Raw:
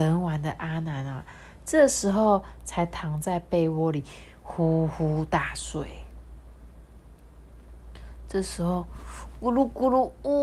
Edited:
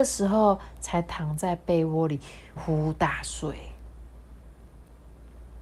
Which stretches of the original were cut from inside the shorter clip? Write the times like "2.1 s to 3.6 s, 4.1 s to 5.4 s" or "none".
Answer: 4.4 s to 4.9 s